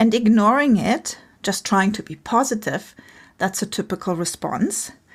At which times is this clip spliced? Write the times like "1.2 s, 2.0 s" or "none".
none